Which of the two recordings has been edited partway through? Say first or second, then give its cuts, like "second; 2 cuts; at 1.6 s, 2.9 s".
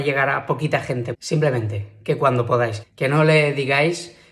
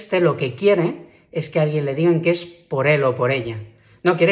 first; 2 cuts; at 1.1 s, 2.8 s